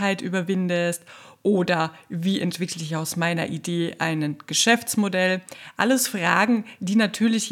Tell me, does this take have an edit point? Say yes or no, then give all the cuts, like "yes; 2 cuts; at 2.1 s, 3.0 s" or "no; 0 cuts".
no; 0 cuts